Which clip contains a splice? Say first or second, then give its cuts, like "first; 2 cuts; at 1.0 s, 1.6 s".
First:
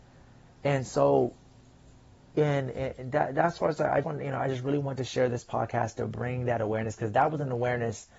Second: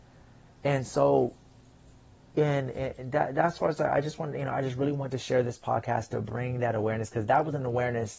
first; 1 cut; at 4.0 s